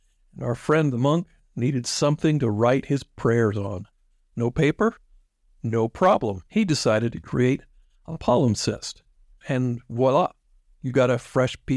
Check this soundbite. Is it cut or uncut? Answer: cut